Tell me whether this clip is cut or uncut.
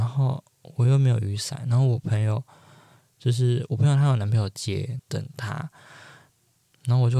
cut